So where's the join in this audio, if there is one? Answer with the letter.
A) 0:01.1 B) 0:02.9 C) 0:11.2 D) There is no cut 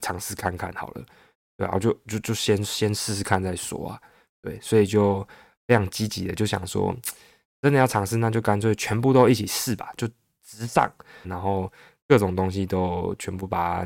C